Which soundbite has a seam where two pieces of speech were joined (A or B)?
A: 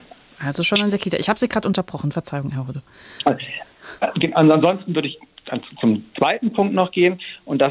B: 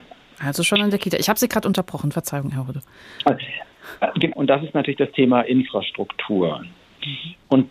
B